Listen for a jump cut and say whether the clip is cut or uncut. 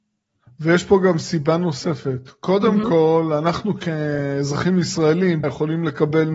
cut